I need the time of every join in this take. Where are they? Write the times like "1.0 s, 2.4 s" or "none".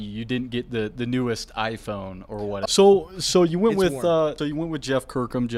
2.7 s, 4.4 s